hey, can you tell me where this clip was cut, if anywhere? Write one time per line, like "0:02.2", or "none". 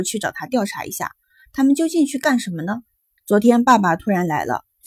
0:03.2

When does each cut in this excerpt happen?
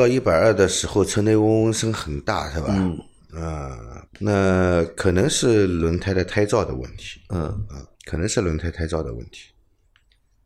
0:04.1
0:07.9

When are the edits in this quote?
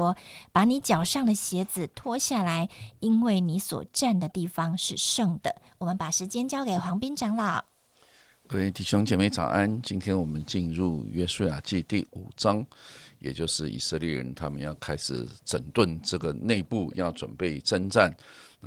0:05.7

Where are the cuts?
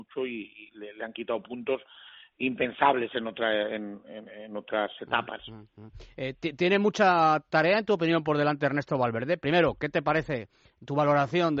none

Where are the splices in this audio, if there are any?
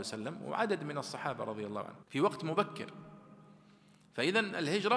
0:02.0

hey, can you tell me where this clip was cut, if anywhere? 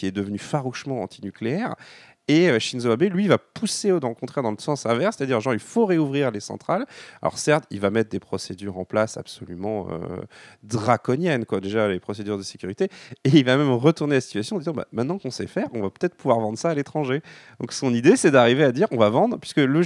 none

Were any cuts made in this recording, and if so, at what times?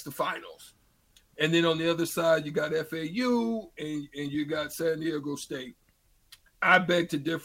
none

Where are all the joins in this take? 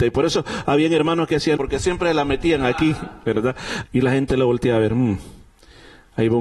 0:01.6
0:03.8

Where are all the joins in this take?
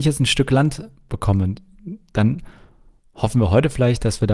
none

